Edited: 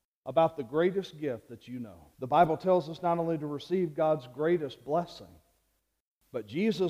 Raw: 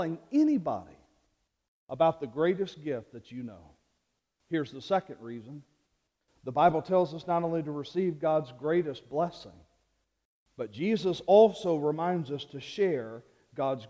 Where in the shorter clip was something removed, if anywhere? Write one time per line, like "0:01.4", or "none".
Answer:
0:02.1